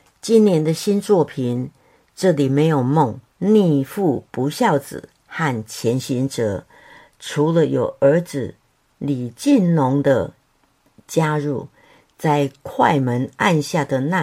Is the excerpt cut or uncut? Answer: cut